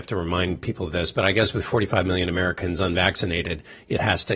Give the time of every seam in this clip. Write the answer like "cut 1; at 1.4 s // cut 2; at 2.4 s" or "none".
none